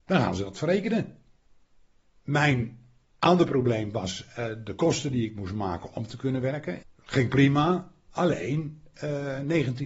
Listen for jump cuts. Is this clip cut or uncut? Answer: cut